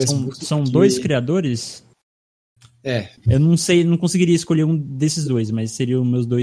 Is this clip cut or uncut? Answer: cut